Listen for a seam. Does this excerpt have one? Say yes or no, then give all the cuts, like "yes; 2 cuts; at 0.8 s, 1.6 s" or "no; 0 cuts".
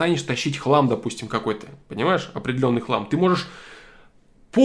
no; 0 cuts